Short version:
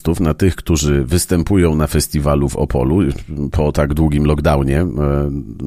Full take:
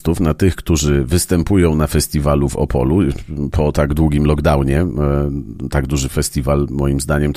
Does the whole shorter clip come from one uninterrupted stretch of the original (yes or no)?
yes